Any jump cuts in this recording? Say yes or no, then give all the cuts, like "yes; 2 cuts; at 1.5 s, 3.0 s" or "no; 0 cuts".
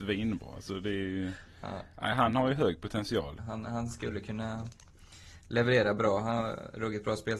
yes; 1 cut; at 3.4 s